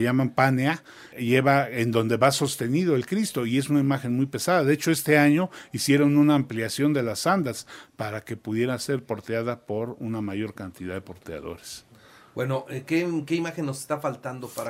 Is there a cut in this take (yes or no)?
yes